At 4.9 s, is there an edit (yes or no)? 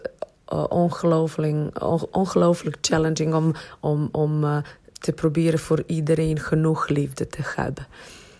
yes